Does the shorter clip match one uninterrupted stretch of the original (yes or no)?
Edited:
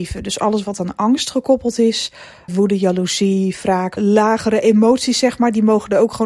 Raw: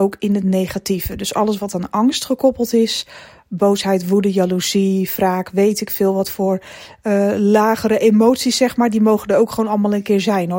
no